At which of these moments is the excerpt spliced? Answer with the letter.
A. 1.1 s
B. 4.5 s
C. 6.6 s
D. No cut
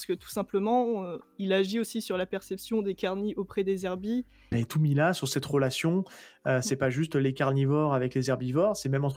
B